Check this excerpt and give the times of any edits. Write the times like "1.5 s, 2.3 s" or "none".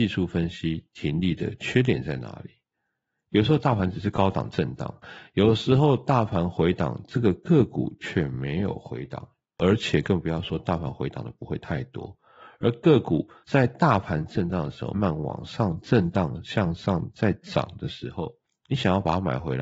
14.9 s